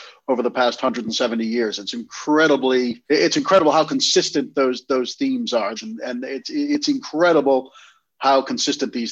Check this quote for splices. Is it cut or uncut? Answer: cut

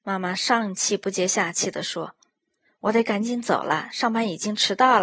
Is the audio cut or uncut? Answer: uncut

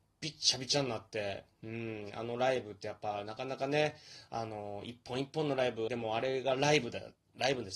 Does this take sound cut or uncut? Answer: cut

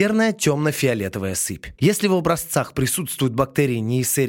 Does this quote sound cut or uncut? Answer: cut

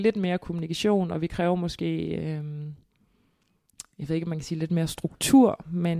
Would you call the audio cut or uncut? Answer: uncut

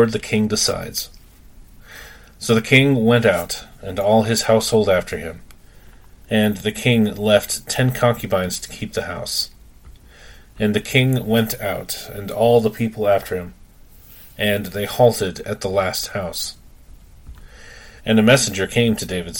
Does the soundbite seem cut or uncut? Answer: cut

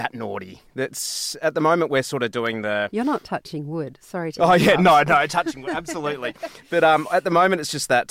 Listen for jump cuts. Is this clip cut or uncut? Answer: uncut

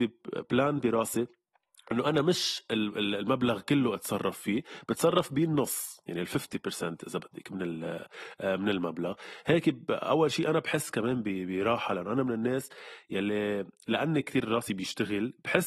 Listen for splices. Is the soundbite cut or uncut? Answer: uncut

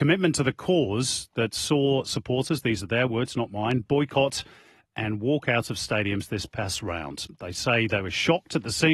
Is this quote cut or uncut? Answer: uncut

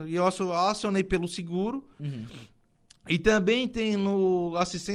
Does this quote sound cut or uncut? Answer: cut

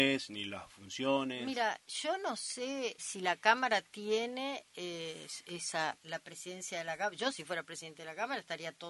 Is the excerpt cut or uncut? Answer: cut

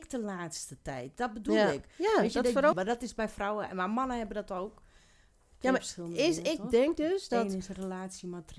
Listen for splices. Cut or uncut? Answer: cut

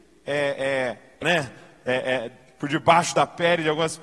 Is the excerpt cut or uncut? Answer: cut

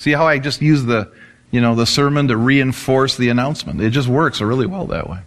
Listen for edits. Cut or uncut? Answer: uncut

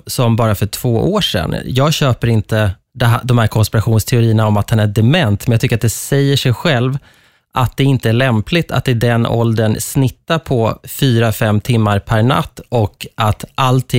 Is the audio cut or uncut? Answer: uncut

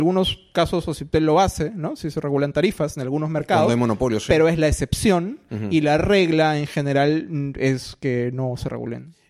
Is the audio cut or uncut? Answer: uncut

